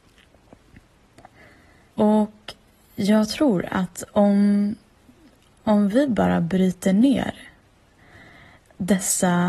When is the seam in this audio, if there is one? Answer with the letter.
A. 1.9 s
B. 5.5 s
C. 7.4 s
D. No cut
A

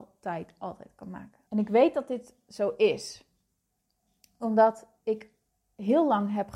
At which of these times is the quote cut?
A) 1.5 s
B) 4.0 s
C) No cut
A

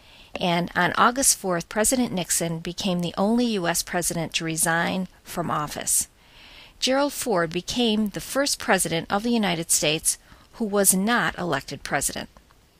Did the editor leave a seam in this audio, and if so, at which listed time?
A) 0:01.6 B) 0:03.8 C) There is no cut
A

